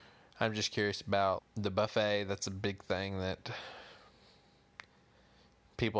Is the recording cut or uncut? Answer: cut